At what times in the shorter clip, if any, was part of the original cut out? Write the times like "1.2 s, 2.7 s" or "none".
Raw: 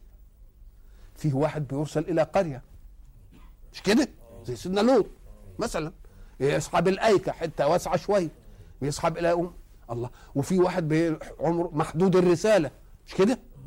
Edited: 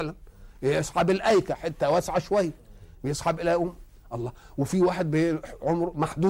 none

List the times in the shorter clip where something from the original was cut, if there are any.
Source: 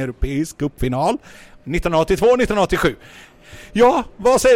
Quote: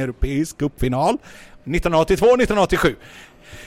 none

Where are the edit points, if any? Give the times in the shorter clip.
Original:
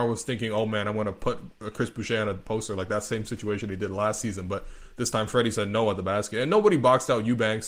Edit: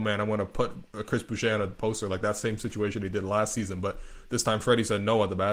none

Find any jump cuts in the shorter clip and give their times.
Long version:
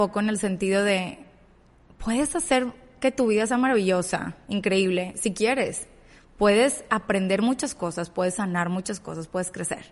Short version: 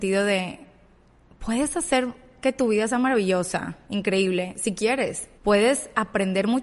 5.4 s

